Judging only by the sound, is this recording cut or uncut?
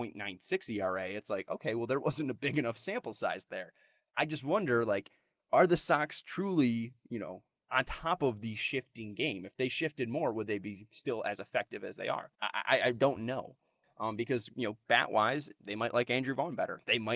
cut